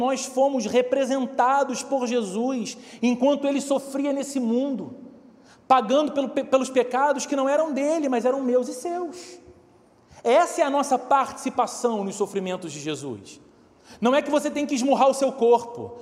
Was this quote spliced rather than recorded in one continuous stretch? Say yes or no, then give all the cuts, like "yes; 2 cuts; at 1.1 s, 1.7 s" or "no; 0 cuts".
no; 0 cuts